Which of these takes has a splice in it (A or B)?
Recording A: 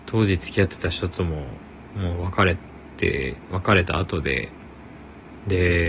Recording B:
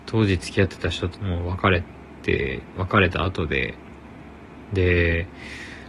B